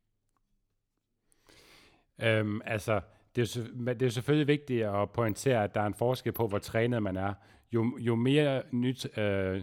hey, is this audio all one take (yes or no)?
yes